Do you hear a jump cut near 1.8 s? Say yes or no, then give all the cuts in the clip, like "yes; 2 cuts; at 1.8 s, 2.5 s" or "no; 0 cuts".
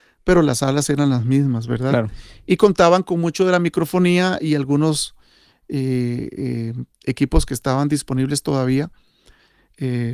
no; 0 cuts